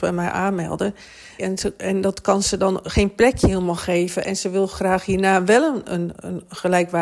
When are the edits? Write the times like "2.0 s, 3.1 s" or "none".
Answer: 1.4 s